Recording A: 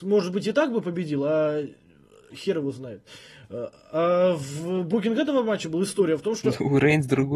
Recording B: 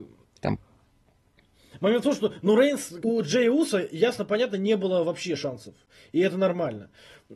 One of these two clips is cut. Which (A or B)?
B